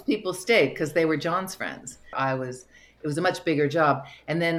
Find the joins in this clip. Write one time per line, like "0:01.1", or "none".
0:02.1